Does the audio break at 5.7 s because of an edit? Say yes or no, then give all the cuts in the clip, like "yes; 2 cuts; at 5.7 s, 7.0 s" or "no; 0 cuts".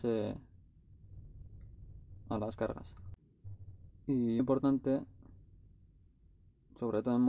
no; 1 cut; at 4.4 s